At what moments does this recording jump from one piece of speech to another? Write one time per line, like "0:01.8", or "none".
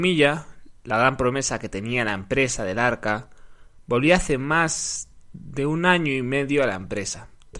none